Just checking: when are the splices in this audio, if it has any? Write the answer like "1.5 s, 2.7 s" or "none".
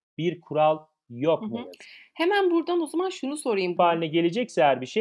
3.8 s